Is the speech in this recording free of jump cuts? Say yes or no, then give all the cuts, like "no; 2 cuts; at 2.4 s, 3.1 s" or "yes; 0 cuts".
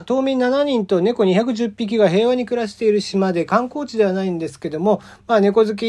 yes; 0 cuts